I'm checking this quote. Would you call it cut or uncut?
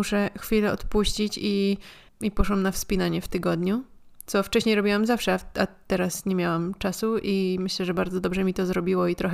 uncut